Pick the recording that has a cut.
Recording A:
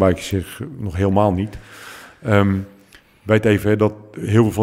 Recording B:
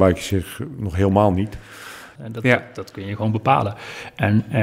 B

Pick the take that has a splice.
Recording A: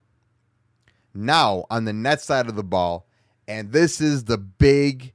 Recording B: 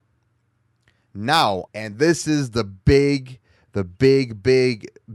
B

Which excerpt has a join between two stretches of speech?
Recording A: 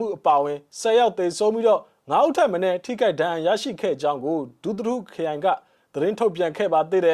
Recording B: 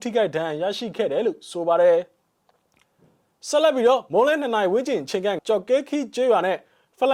B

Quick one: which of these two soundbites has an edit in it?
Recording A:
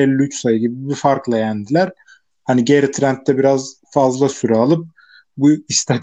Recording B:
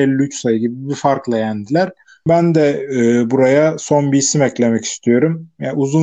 B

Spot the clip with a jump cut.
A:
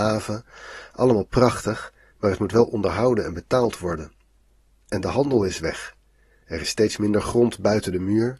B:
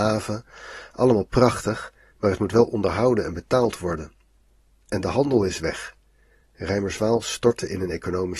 A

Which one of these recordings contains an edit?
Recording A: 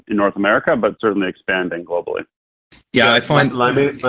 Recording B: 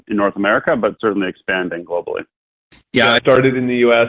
B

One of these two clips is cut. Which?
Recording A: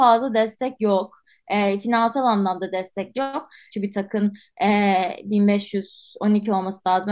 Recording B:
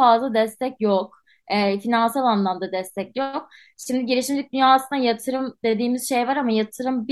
A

